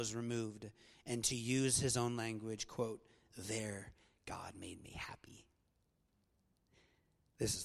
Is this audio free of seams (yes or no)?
yes